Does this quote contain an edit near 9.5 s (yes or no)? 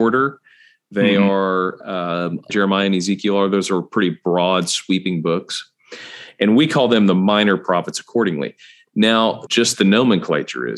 yes